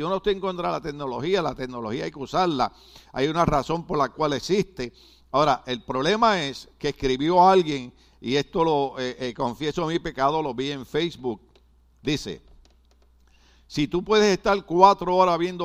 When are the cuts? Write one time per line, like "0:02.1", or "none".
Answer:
none